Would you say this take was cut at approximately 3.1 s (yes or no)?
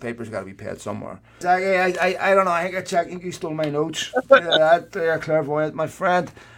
no